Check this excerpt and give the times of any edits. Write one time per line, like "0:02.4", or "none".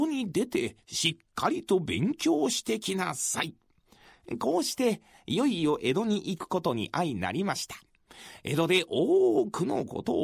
none